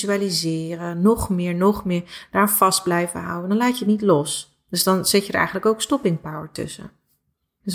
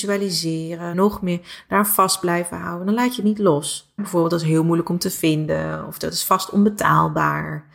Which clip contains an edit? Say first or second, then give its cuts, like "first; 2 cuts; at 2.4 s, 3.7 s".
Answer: second; 2 cuts; at 0.9 s, 4.0 s